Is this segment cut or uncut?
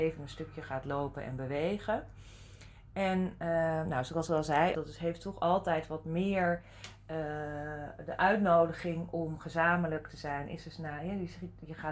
cut